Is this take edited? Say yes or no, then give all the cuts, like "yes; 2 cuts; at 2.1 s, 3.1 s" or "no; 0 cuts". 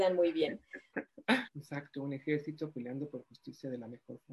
yes; 1 cut; at 1.5 s